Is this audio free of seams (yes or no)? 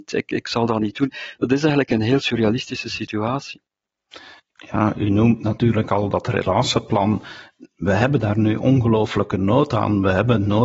yes